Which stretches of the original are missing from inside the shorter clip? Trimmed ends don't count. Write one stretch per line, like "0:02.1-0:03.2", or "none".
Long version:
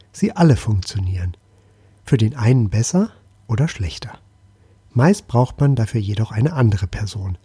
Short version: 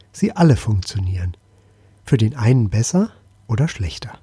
none